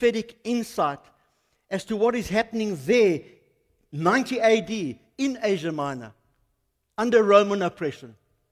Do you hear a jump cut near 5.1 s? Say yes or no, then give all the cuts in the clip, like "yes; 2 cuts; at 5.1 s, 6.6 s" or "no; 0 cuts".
no; 0 cuts